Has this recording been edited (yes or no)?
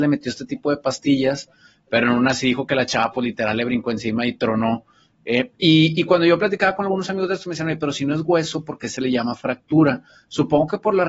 no